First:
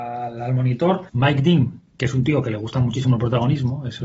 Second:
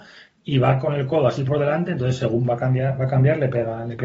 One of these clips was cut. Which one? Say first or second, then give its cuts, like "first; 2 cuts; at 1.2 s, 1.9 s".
first; 1 cut; at 1.1 s